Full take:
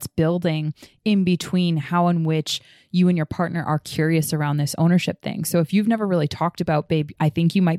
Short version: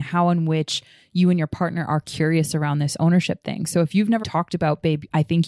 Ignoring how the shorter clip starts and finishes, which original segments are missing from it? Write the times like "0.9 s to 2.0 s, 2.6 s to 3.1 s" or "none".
6.0 s to 6.3 s